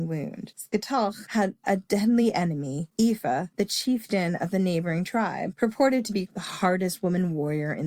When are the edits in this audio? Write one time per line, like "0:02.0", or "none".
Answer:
0:06.3